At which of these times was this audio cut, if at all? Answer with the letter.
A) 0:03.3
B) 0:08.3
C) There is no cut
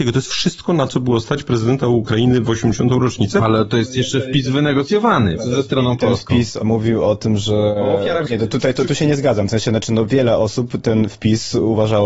B